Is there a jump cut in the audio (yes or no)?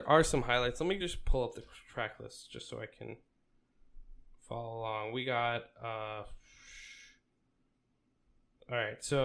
no